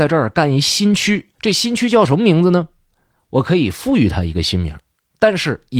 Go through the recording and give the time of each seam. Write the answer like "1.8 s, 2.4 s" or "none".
1.3 s